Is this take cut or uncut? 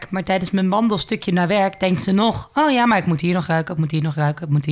uncut